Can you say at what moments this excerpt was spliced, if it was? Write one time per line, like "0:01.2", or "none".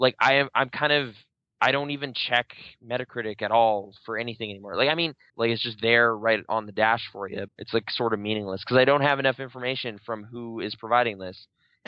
0:05.3
0:07.5